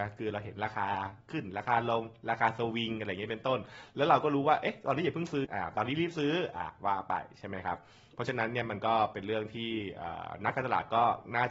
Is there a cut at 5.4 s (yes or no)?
yes